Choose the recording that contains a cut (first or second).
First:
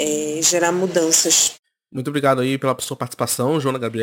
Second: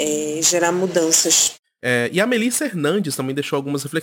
second